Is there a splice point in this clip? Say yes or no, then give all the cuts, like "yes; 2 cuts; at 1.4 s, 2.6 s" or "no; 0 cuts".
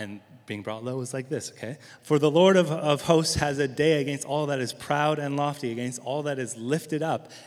yes; 1 cut; at 2.0 s